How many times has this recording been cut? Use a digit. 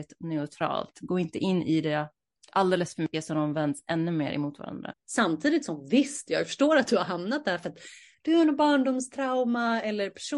1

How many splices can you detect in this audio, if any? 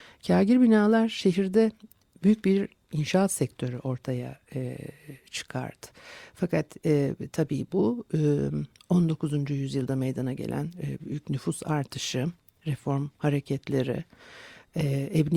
1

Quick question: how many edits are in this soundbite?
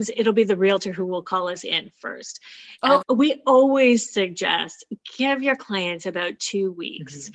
1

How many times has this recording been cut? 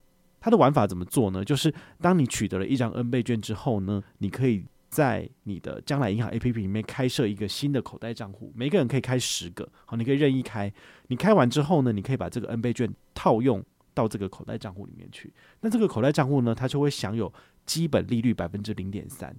0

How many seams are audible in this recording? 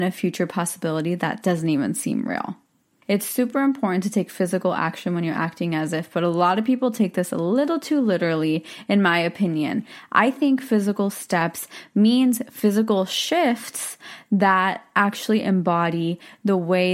1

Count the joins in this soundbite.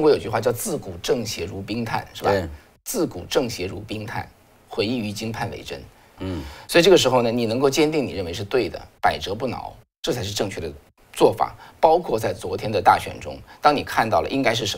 1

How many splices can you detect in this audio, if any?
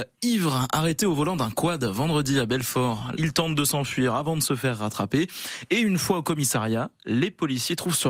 1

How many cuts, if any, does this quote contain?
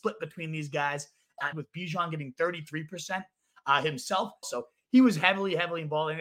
2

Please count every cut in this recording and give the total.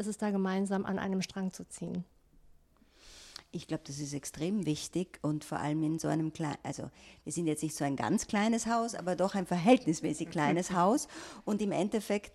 0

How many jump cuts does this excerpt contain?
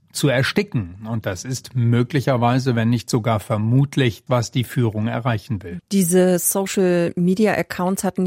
2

